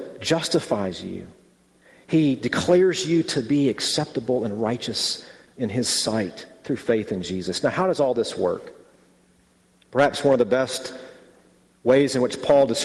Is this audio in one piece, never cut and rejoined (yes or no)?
yes